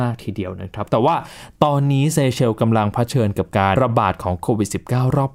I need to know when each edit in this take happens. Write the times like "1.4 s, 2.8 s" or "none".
3.7 s